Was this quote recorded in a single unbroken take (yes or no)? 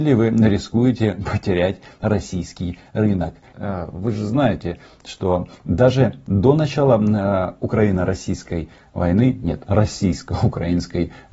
no